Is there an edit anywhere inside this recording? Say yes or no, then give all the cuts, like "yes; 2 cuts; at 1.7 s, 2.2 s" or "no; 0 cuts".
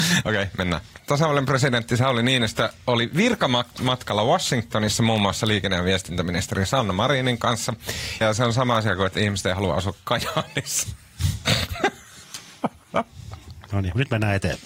yes; 2 cuts; at 1.0 s, 8.2 s